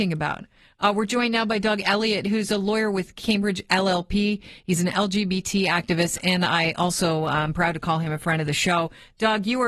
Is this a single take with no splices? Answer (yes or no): yes